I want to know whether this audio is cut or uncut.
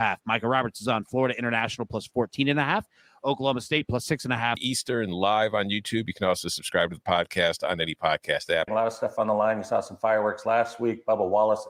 cut